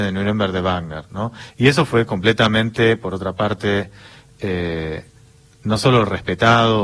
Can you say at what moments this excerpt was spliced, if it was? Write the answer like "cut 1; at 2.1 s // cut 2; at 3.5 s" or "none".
cut 1; at 1.5 s